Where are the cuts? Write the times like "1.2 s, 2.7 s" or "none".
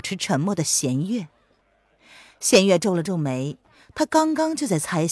none